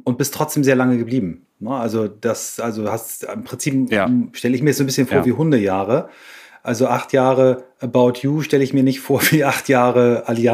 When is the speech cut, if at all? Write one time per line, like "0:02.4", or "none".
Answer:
none